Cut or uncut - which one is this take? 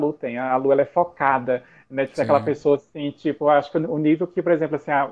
uncut